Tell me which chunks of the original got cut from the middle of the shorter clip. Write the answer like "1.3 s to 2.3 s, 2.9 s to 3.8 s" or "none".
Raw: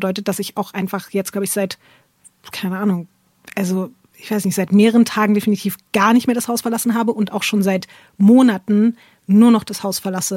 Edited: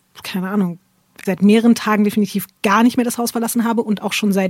3.5 s to 4.6 s